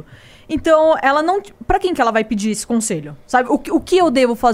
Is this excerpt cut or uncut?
uncut